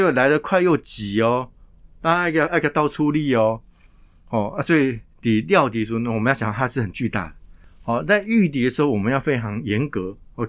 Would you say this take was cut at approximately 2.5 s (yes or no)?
yes